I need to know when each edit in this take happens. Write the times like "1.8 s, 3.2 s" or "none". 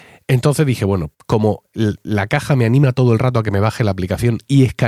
1.1 s